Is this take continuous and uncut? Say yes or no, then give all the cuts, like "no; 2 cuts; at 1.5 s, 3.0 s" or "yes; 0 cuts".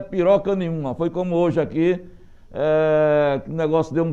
yes; 0 cuts